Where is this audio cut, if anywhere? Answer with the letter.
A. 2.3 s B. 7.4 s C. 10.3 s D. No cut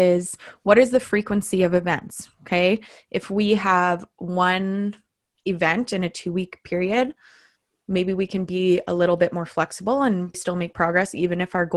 C